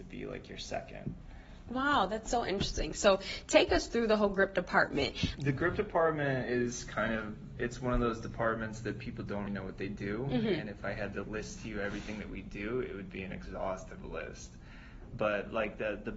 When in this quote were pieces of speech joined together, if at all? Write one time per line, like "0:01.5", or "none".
0:05.3
0:09.5
0:11.2